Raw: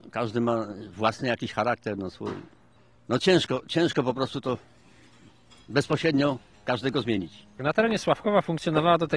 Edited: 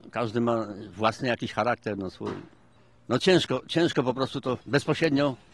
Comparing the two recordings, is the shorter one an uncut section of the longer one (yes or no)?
no